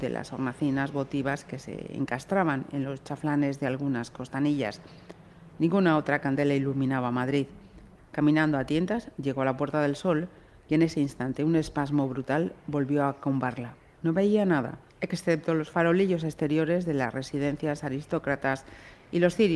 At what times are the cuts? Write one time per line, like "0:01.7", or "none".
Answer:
0:08.0
0:14.0